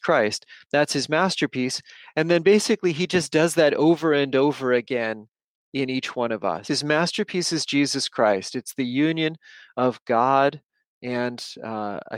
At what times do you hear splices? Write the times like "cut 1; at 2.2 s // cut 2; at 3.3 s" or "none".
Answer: cut 1; at 6.7 s

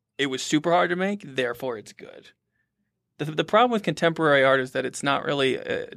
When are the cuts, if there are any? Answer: none

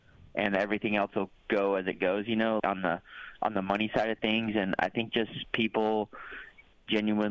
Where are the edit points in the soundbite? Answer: cut 1; at 2.6 s

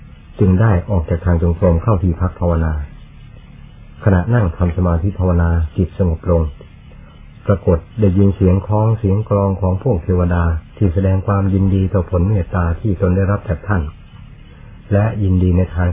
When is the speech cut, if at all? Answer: cut 1; at 7.9 s // cut 2; at 10.7 s

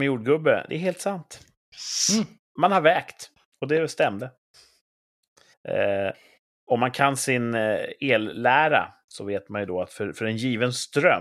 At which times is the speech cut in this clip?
cut 1; at 5.5 s

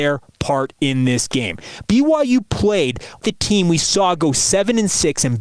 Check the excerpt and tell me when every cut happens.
cut 1; at 1.8 s // cut 2; at 3.2 s

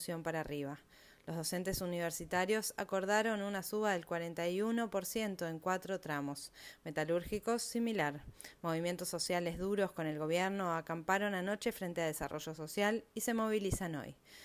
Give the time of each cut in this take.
none

